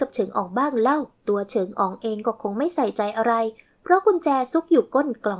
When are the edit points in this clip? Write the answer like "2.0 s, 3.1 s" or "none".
1.2 s